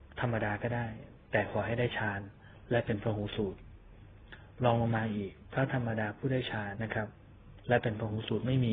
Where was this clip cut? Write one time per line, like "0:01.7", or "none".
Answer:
0:06.7